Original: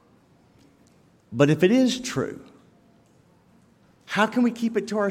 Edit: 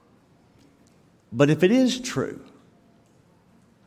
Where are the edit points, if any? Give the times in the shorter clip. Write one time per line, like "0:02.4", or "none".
none